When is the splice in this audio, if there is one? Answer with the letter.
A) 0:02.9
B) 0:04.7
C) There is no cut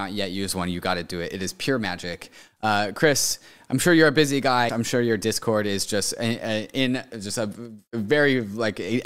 B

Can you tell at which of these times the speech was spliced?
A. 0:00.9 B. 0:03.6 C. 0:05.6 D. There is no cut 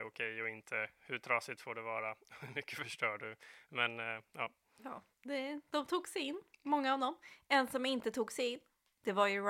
D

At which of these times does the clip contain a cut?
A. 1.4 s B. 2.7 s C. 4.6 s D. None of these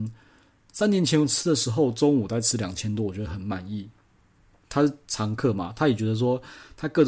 C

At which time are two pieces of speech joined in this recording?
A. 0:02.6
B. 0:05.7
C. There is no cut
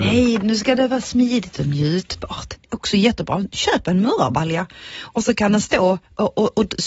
A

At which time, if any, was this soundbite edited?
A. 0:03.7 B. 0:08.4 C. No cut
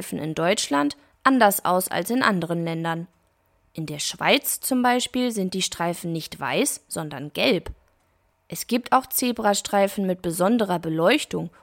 C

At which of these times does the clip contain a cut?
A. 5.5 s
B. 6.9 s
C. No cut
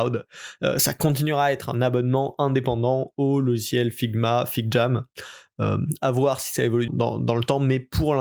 B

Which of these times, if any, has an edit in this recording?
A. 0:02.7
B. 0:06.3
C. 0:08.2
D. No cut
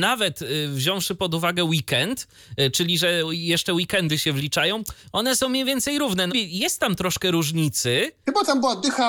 B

